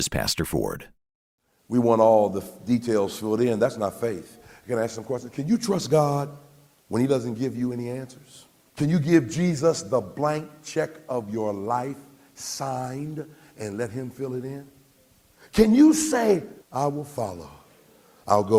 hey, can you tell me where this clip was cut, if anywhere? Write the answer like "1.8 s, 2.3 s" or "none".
8.7 s, 16.6 s

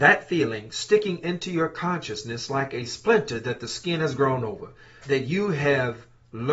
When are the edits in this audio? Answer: 5.0 s

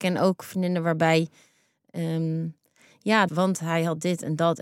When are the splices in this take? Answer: 3.3 s

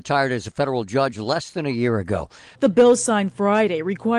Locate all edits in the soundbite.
2.6 s

